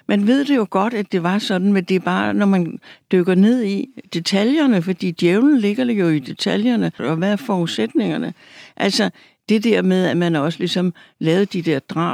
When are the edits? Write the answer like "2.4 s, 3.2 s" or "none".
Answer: 7.0 s